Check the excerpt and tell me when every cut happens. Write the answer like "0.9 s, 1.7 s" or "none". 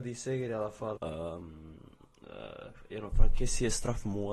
1.0 s